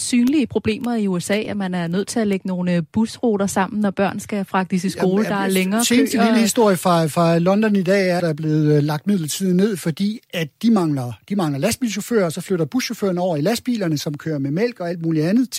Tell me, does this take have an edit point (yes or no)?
yes